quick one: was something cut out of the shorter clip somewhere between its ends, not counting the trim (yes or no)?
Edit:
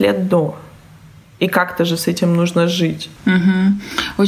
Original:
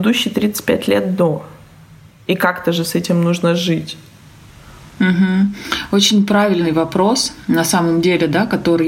yes